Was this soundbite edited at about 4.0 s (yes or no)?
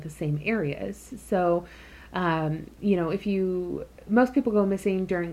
yes